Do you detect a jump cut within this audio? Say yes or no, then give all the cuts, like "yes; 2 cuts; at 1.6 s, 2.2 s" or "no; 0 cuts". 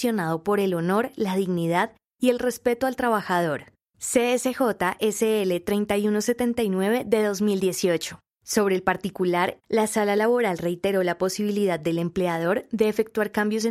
yes; 1 cut; at 9.6 s